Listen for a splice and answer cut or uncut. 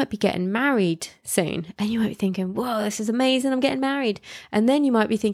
uncut